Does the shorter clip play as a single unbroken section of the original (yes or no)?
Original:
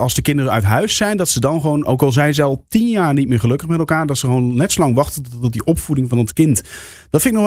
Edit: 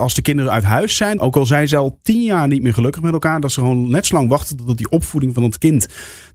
no